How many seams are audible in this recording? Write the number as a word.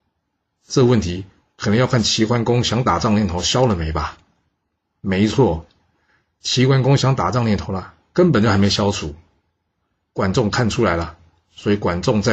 zero